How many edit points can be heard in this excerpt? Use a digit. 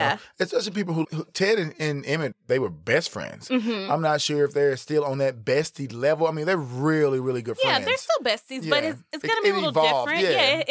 1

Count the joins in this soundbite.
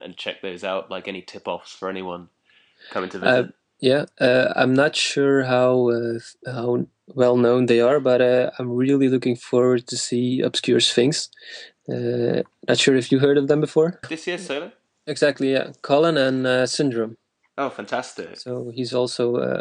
2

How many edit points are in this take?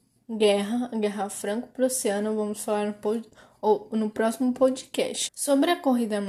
1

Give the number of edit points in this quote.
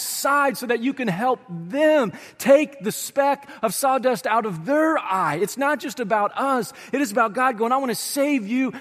0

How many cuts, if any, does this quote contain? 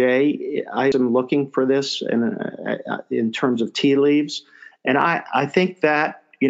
2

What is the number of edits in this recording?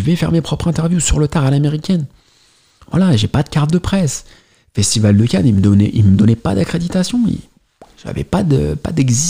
0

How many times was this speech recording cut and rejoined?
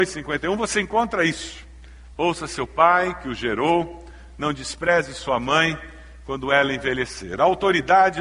1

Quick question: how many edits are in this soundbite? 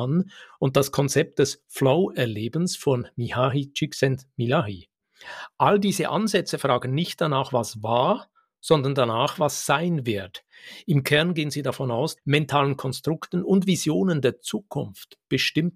1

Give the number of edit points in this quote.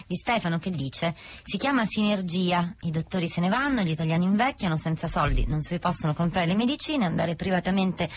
0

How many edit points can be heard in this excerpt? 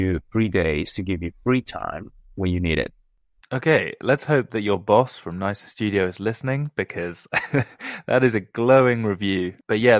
1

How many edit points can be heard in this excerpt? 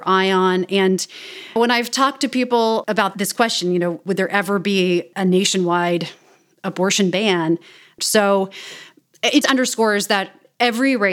3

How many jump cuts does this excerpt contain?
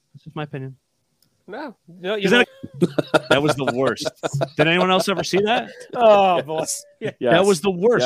1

